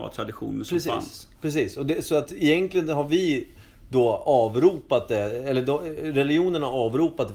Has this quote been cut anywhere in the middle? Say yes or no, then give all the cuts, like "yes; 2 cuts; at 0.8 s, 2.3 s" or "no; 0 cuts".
no; 0 cuts